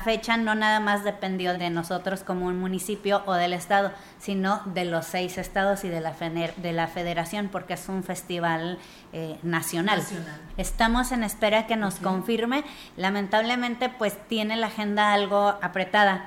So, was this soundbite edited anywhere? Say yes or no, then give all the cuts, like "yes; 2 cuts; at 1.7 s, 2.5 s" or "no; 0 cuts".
yes; 2 cuts; at 1.5 s, 10.5 s